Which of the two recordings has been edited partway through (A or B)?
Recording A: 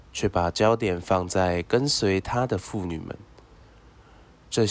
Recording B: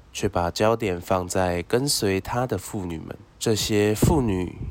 B